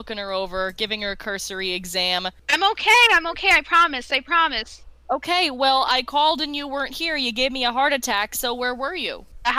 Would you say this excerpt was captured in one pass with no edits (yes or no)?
yes